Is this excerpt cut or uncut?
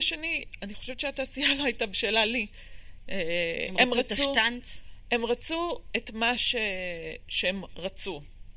uncut